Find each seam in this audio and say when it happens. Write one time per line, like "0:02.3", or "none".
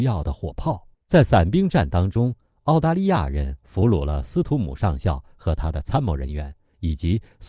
0:00.9